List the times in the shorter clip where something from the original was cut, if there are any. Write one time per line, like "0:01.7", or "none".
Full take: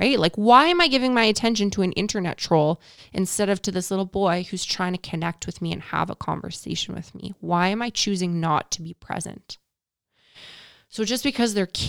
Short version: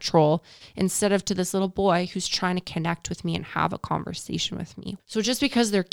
0:05.0